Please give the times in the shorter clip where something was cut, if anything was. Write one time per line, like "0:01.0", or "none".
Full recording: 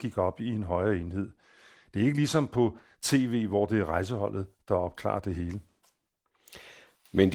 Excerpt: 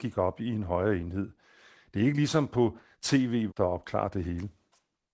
0:03.5